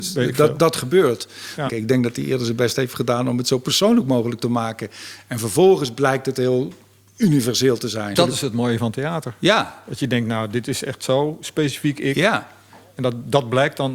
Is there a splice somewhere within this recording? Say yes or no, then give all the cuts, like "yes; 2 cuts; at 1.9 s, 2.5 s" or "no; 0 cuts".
yes; 2 cuts; at 1.7 s, 8.1 s